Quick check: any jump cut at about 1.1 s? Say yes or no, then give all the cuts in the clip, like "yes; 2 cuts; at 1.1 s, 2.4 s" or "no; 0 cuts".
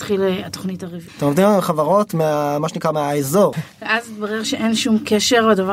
yes; 2 cuts; at 1.1 s, 3.5 s